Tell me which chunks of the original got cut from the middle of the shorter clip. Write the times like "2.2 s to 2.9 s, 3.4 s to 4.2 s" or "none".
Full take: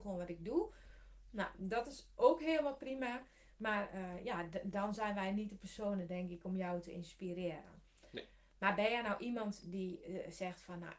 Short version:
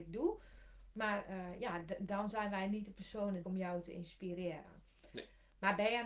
1.2 s to 3.5 s, 6.1 s to 6.4 s